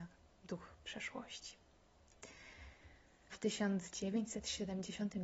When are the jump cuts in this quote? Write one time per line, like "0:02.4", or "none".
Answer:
0:03.3